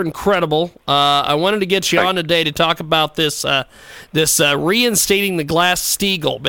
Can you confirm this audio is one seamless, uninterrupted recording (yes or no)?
yes